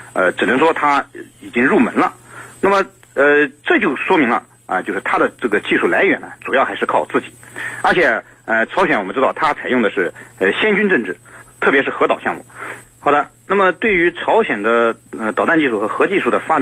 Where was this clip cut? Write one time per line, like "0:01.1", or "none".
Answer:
0:08.7
0:11.4
0:12.8